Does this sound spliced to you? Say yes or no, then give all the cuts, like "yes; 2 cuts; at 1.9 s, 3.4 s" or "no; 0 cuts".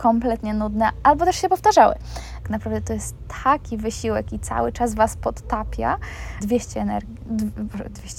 yes; 2 cuts; at 2.4 s, 6.4 s